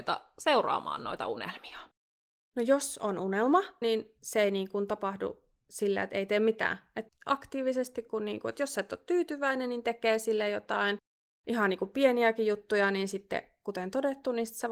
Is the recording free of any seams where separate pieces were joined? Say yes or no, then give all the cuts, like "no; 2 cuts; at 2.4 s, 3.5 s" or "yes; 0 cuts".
no; 1 cut; at 3.8 s